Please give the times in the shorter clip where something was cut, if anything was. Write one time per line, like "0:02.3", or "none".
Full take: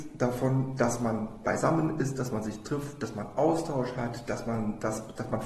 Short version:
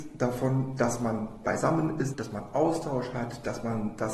0:02.1